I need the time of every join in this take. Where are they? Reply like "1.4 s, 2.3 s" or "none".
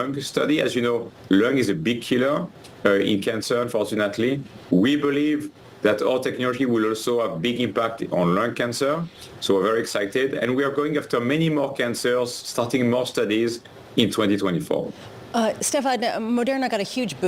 none